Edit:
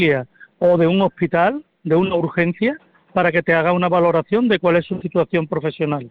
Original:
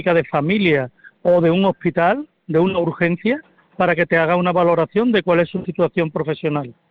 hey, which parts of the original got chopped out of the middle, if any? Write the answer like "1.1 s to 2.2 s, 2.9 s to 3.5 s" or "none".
none